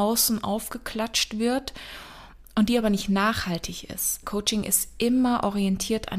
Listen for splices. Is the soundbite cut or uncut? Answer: cut